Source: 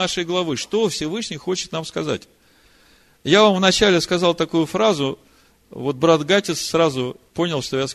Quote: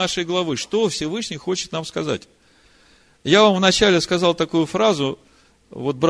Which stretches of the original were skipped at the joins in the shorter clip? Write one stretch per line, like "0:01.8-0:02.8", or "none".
none